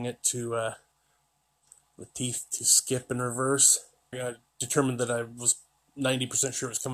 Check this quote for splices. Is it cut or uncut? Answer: cut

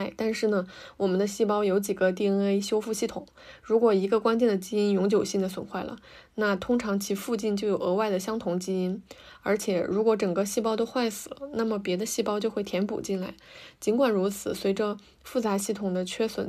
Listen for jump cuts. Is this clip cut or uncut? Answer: uncut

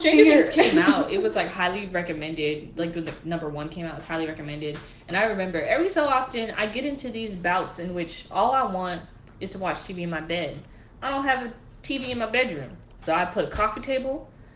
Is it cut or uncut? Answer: uncut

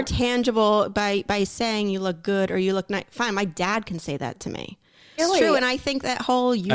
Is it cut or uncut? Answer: cut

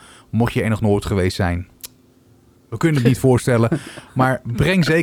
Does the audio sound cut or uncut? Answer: uncut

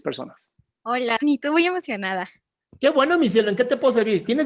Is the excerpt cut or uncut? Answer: cut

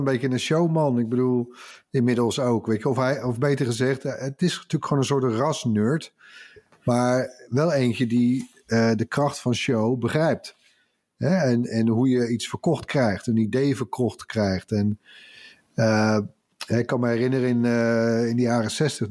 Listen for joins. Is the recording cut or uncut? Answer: uncut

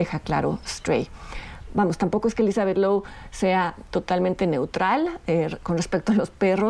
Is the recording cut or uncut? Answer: uncut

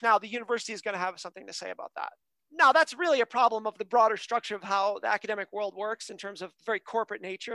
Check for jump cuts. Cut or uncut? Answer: uncut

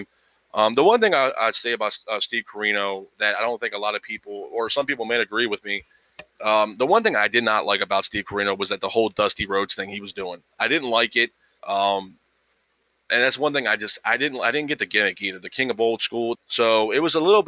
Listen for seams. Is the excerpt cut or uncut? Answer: cut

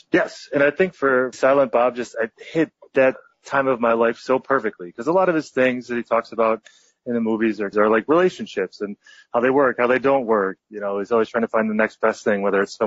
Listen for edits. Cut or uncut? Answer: cut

